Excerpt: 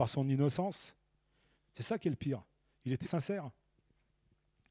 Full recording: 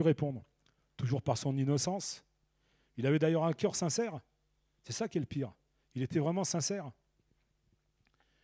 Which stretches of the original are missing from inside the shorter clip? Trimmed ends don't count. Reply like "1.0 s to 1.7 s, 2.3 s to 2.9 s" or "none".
2.8 s to 4.7 s, 6.1 s to 6.4 s